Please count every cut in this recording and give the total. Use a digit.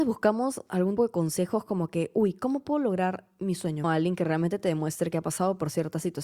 2